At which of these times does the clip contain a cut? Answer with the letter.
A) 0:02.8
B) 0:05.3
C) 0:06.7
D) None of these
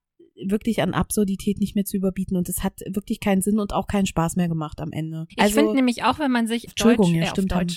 C